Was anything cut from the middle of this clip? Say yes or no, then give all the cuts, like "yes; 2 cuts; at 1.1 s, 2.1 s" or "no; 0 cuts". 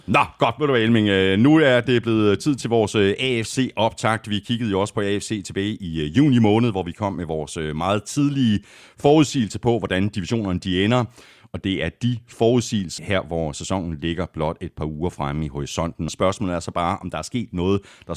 yes; 2 cuts; at 13.0 s, 16.1 s